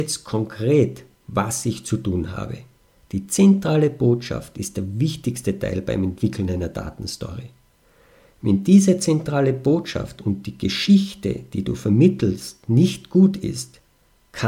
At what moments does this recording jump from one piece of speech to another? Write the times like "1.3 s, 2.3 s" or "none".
3.0 s

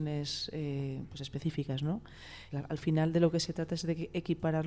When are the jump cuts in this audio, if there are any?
2.5 s

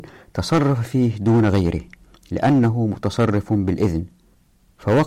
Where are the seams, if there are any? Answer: none

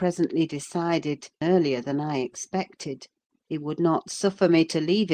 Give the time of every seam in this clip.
1.4 s, 3.3 s

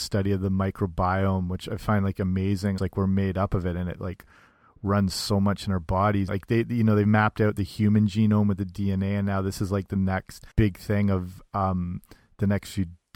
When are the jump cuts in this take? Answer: 2.8 s, 6.3 s, 10.5 s

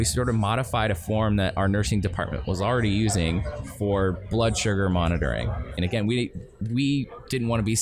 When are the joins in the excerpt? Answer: 5.8 s

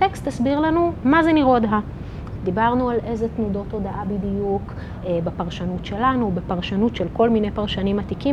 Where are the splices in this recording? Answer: 2.4 s

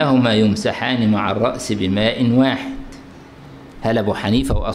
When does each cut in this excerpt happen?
3.7 s

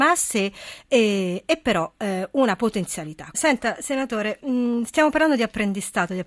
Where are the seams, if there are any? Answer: 3.3 s

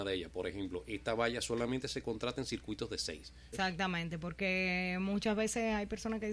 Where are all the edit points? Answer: 3.5 s

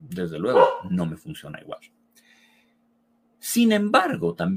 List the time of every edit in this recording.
none

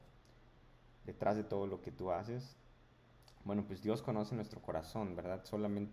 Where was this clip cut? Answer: none

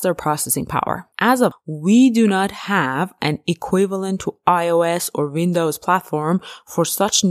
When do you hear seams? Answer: 1.5 s

